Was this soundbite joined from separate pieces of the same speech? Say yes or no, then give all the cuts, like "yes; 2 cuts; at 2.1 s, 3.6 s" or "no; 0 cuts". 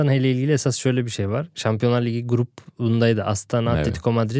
no; 0 cuts